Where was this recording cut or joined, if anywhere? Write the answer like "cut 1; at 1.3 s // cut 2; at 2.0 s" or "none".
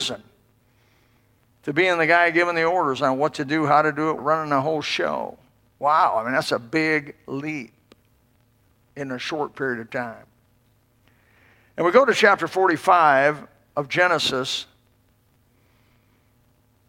cut 1; at 4.2 s